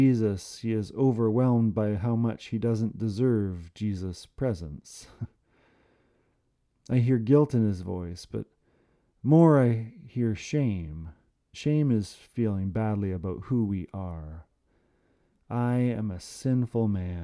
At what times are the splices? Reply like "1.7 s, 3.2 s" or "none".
11.5 s

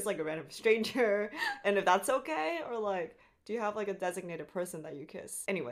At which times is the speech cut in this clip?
none

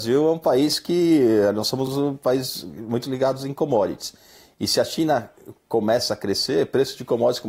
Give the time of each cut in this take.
none

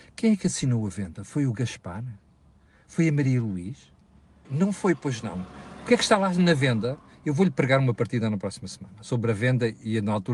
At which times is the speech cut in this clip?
4.4 s

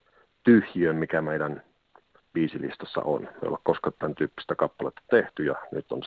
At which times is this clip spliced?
none

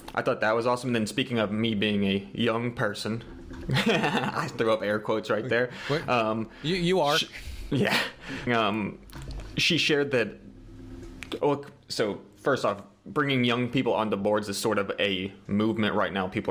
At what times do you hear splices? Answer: 8.5 s

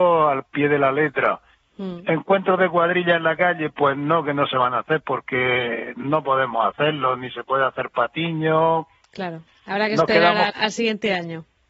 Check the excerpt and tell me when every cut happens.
9.5 s, 10.5 s

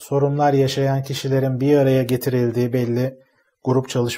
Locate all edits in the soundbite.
none

